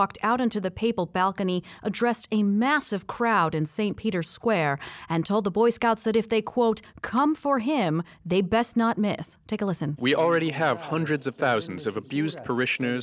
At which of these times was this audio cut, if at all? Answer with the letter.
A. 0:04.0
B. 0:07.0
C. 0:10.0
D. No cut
C